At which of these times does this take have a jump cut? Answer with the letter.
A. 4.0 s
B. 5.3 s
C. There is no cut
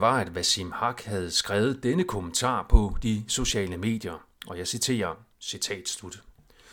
B